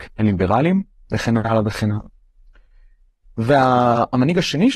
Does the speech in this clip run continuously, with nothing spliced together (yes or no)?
yes